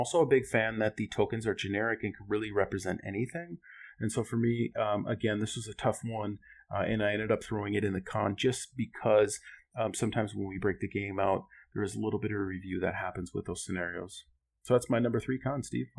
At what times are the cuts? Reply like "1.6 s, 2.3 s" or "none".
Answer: none